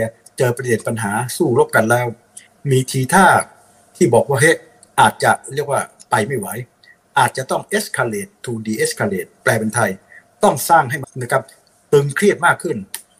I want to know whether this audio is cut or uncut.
cut